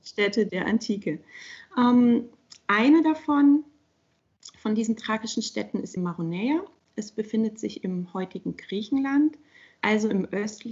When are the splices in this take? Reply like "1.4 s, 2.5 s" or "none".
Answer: 6.0 s, 9.8 s